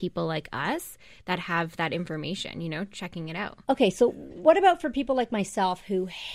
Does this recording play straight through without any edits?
yes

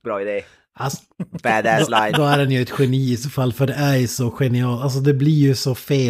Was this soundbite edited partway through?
no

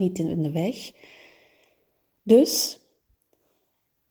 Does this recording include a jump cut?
no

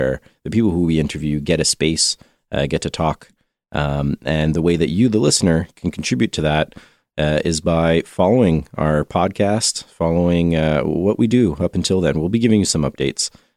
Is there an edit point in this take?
no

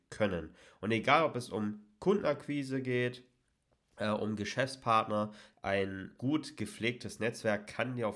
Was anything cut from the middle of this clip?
yes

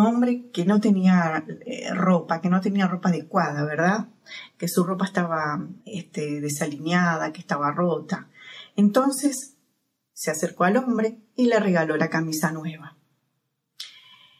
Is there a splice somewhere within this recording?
yes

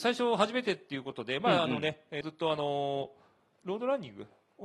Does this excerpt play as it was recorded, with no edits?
no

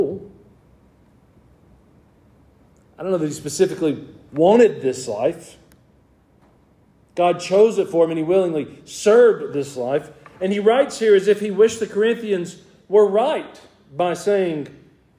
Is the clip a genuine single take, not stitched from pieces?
yes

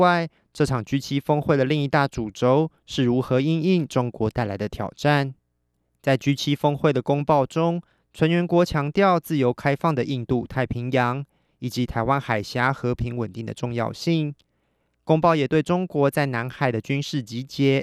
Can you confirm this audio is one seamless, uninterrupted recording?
yes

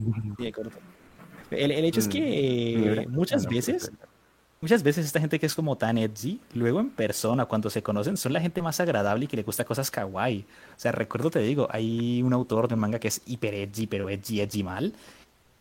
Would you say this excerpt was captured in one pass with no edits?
yes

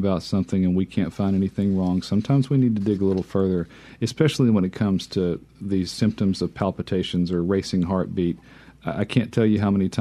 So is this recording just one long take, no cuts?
yes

